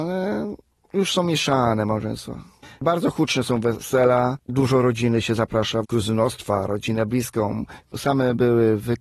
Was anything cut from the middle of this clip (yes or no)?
yes